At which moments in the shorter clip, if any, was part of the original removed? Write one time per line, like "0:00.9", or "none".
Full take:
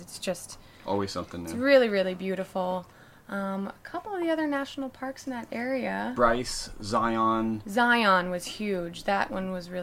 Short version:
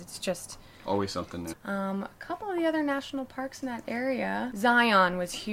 0:01.5
0:04.5